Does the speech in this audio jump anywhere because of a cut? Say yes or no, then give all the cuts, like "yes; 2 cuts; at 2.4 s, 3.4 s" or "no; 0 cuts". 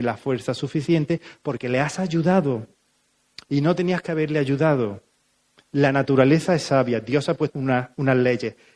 yes; 1 cut; at 7.5 s